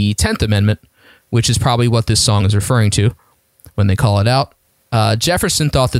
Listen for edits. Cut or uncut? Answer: uncut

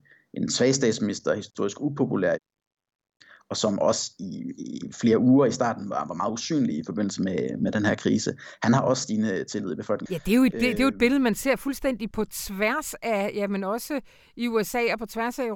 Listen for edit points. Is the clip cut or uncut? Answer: cut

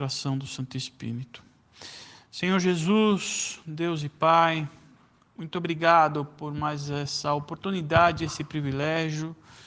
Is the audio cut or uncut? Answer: uncut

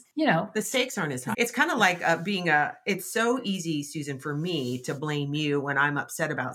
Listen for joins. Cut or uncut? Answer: cut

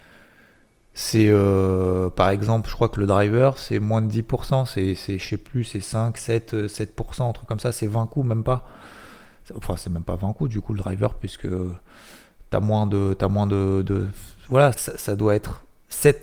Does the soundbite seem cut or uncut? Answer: cut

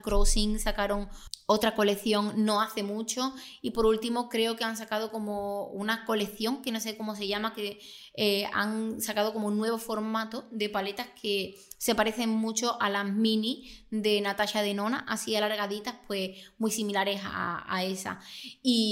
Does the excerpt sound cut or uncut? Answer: uncut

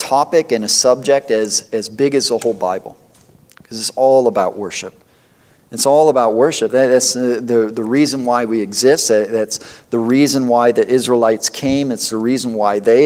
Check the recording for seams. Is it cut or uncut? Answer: uncut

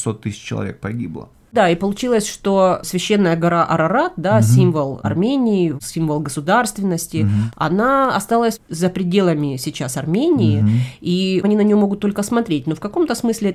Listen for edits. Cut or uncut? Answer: uncut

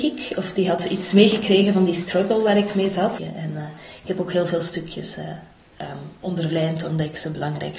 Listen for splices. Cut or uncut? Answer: cut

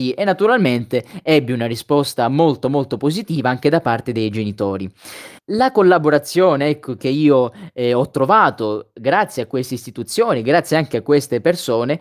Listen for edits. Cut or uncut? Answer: cut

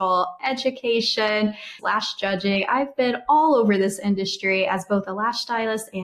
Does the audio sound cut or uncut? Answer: cut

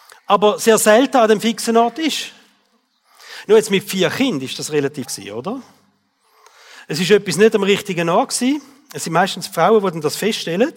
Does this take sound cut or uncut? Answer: cut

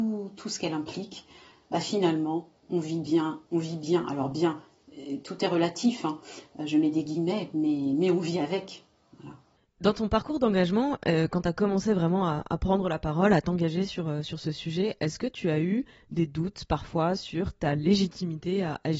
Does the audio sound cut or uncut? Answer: uncut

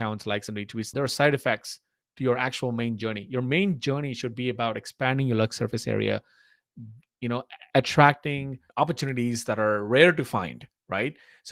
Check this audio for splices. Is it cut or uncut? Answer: cut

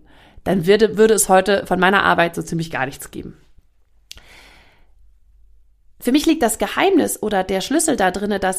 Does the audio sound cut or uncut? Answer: uncut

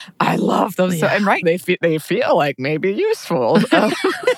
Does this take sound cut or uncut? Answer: cut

